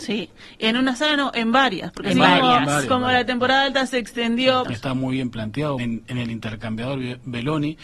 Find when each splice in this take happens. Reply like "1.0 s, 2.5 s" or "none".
4.6 s, 5.8 s